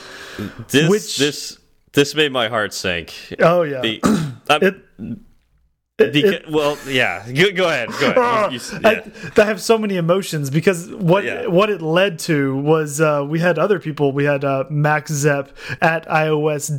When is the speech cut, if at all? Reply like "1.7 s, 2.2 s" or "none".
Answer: 15.8 s